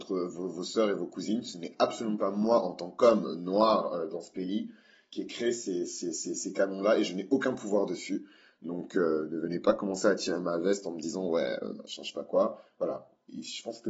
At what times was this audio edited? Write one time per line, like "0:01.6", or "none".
none